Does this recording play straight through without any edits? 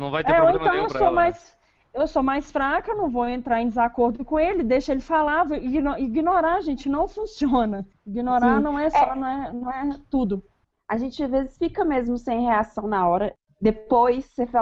yes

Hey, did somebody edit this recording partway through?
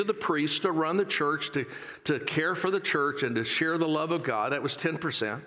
no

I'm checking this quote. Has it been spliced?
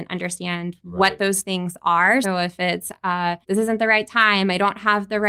yes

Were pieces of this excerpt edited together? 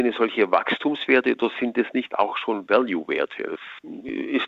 no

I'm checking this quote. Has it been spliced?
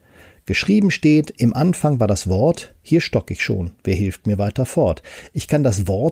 no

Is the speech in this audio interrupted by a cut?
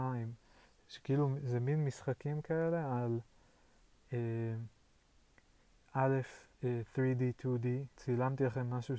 yes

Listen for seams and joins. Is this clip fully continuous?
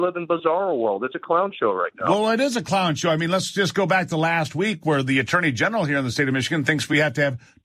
yes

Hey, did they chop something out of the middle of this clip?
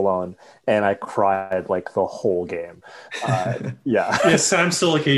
no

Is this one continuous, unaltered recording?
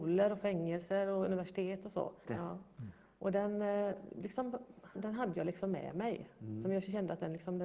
no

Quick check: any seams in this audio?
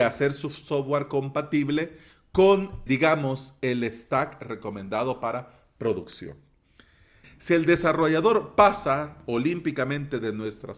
yes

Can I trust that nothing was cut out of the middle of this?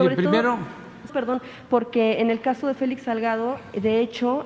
no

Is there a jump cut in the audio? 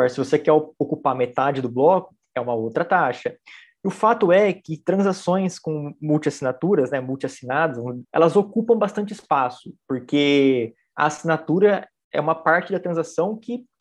yes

